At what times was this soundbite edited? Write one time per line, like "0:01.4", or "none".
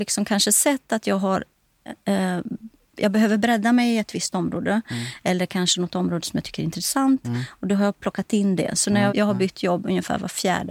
0:09.1